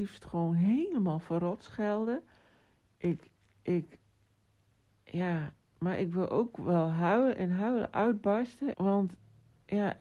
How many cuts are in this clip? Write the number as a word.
one